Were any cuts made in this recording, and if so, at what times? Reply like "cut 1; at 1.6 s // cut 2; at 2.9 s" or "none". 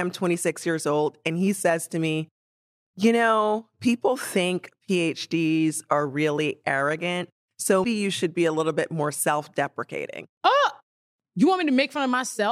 cut 1; at 7.8 s

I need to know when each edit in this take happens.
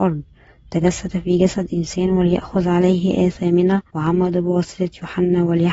cut 1; at 3.9 s

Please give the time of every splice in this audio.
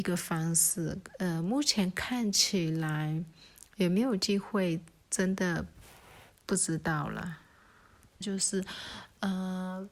cut 1; at 8.2 s

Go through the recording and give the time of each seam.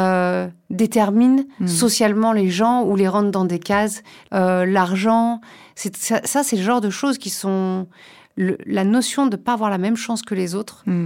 cut 1; at 4.3 s

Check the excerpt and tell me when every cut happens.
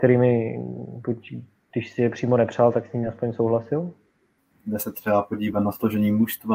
cut 1; at 4.5 s

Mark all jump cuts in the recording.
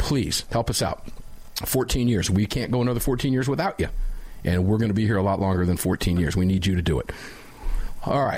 none

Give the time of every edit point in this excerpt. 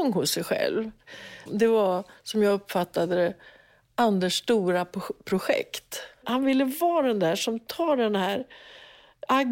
cut 1; at 1.5 s // cut 2; at 6.1 s

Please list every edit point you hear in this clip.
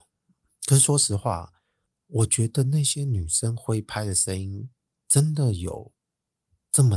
none

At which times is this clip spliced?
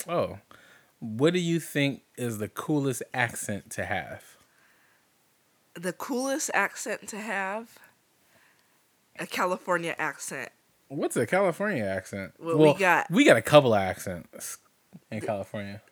cut 1; at 15.0 s

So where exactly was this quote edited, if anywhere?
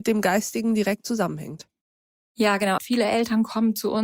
cut 1; at 2.8 s

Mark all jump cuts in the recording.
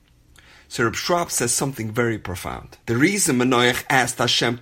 cut 1; at 2.8 s

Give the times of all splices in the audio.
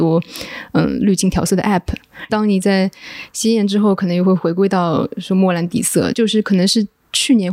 cut 1; at 2.3 s // cut 2; at 6.1 s

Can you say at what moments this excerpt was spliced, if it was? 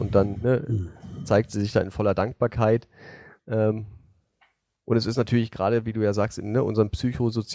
cut 1; at 3.4 s

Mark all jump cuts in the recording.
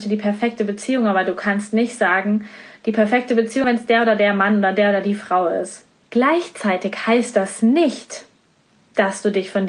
cut 1; at 3.6 s // cut 2; at 6.1 s

